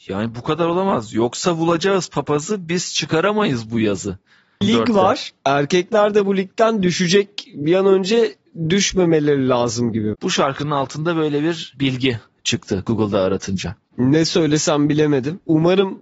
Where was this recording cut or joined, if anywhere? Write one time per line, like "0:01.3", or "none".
0:04.6
0:10.1